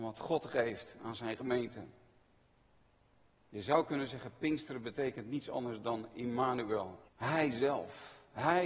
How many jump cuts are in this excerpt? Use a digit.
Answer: 1